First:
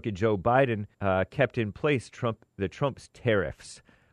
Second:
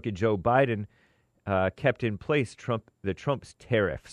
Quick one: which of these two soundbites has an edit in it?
first; 1 cut; at 0.9 s

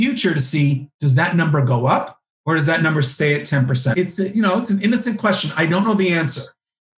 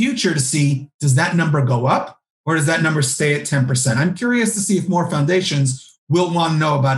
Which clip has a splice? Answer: first; 1 cut; at 3.9 s

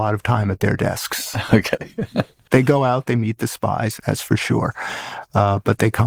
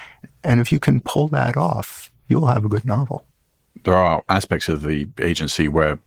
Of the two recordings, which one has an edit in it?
first; 1 cut; at 4.0 s

